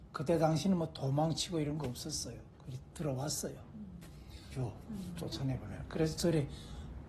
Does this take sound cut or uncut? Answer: cut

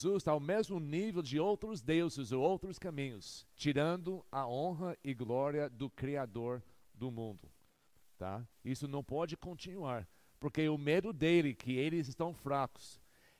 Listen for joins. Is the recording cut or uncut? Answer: cut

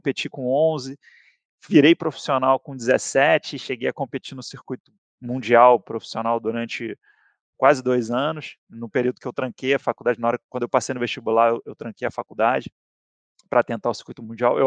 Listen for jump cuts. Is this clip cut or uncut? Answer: uncut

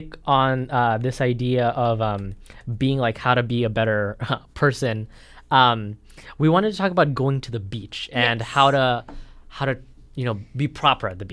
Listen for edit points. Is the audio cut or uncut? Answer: uncut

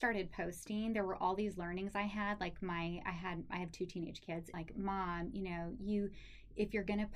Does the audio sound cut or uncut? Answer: cut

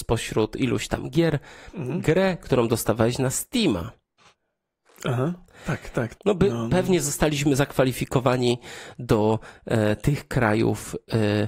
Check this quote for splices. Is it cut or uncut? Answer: cut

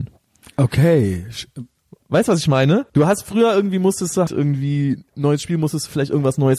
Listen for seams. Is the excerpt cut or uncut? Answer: cut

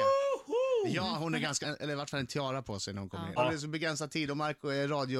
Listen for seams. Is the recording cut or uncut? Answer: cut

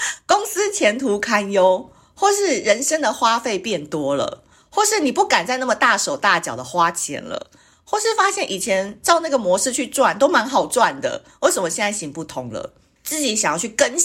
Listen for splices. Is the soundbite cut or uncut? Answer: cut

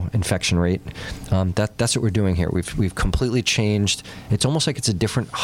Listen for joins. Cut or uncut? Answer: uncut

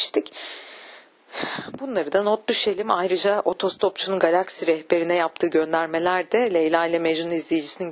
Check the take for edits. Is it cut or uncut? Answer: uncut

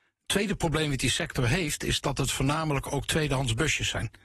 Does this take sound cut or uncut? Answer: uncut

